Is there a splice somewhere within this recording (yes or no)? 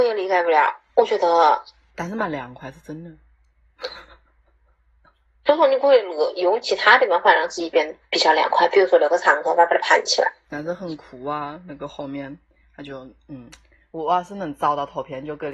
no